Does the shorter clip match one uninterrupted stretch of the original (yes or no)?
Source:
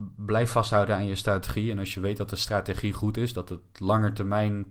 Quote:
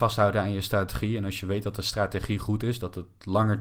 yes